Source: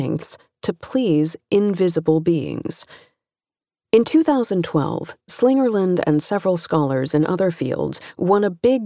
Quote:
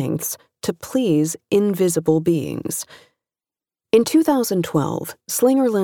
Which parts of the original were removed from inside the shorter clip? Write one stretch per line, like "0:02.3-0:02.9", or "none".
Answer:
none

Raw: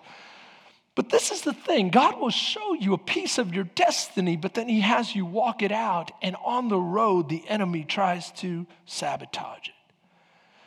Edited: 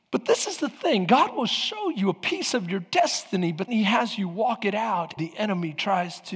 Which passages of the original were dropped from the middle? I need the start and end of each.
0:04.5-0:04.6
0:06.1-0:07.3

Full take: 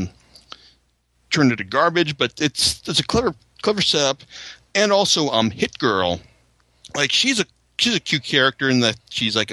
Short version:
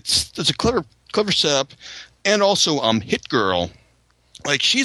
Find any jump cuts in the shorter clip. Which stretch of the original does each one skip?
none

